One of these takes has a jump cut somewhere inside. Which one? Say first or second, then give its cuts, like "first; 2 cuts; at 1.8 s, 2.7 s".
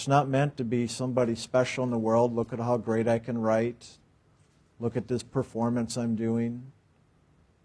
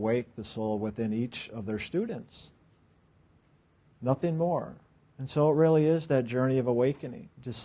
second; 1 cut; at 5.1 s